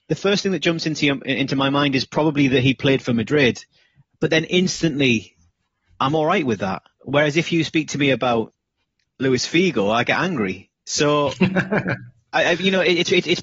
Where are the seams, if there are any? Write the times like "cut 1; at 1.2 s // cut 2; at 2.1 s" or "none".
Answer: none